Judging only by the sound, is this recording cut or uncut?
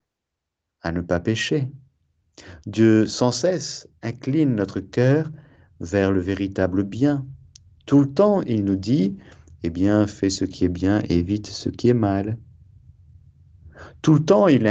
uncut